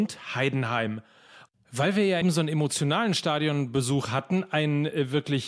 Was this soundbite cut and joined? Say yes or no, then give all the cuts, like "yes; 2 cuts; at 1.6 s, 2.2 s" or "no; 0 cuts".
yes; 1 cut; at 2.2 s